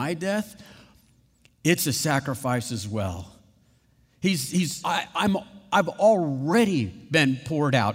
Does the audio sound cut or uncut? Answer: cut